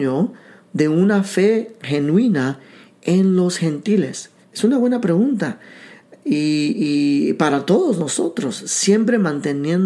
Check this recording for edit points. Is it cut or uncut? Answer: cut